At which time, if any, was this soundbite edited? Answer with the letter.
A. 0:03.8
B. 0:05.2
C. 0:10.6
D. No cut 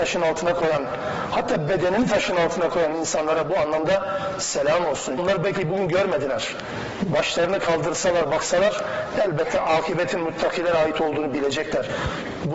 B